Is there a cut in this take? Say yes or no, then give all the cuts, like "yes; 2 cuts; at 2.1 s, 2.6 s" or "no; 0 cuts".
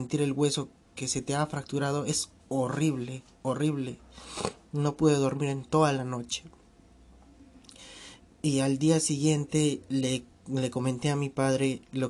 no; 0 cuts